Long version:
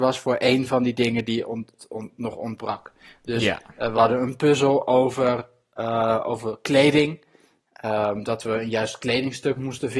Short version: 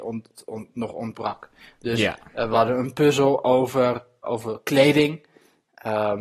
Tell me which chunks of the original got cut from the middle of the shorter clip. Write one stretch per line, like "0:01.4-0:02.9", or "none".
0:05.7-0:06.2